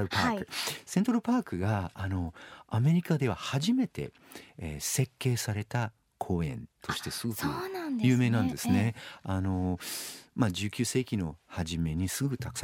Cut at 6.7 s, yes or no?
yes